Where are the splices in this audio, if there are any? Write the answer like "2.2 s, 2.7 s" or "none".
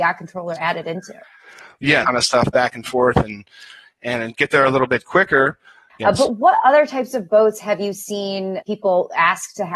2.0 s, 5.9 s, 8.6 s

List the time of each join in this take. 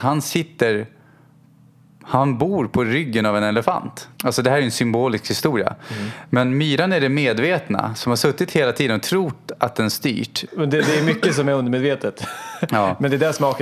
4.2 s, 10.5 s

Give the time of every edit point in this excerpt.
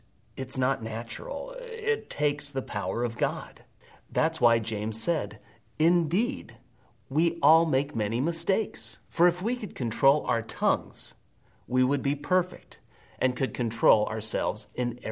9.0 s

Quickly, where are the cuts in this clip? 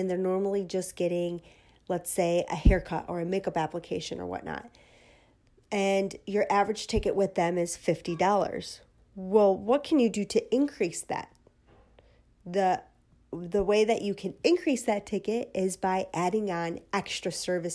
none

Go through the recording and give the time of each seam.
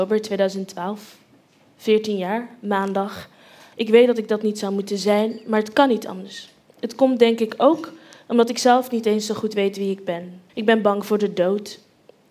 3.7 s, 10.5 s

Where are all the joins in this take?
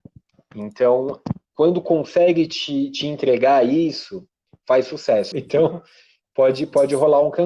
5.3 s

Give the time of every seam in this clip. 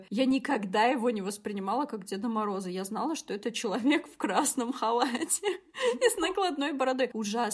none

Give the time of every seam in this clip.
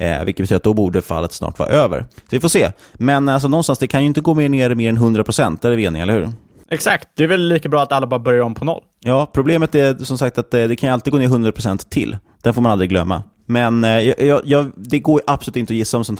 none

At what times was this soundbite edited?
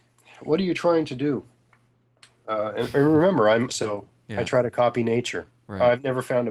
3.7 s

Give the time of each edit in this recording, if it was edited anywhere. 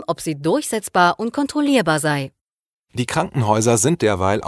none

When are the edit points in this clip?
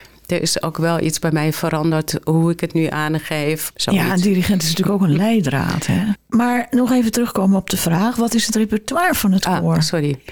3.7 s, 6.1 s

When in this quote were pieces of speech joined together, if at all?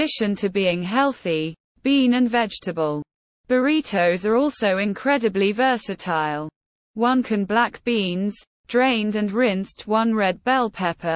6.8 s

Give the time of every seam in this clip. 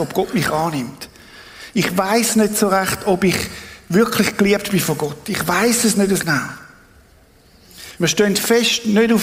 6.2 s, 8.0 s

